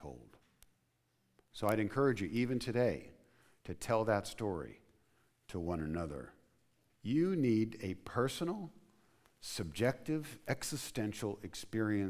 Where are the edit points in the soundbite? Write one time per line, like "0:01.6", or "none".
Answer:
0:06.9